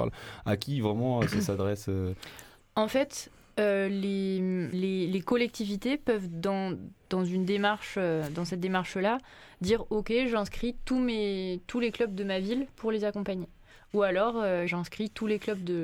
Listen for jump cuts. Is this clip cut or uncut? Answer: cut